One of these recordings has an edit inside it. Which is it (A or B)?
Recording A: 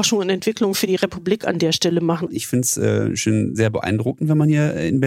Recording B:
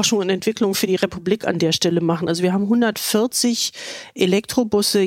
A